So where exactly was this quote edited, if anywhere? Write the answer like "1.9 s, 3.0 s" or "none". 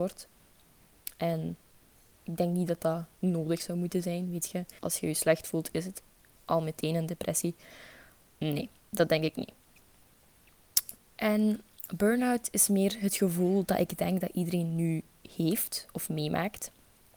4.8 s, 11.0 s